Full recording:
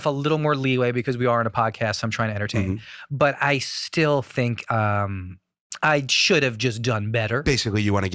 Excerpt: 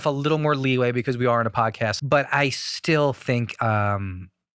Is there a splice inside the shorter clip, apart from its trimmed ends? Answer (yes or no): yes